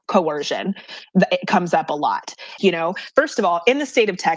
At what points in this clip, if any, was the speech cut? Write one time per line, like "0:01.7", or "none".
0:02.6